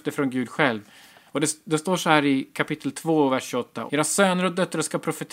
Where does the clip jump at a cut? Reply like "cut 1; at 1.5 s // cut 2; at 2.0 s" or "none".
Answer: cut 1; at 1.3 s // cut 2; at 3.9 s